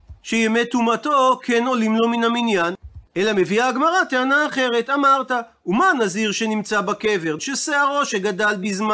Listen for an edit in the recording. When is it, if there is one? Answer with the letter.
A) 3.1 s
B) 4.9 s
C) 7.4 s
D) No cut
C